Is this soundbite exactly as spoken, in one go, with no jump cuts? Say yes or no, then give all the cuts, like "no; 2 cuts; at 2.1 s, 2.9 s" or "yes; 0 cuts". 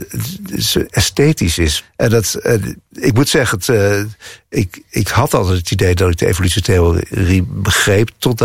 no; 1 cut; at 1.8 s